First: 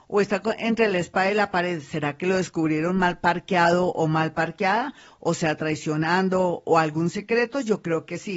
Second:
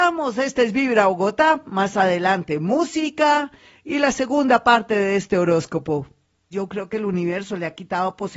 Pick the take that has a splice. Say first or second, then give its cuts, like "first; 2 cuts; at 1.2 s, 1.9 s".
second; 1 cut; at 6.5 s